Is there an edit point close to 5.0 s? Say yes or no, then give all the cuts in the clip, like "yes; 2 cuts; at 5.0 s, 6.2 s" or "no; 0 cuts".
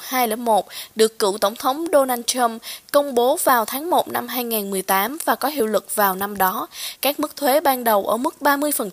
no; 1 cut; at 7.0 s